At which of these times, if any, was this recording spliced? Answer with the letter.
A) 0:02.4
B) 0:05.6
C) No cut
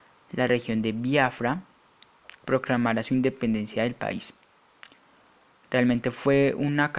A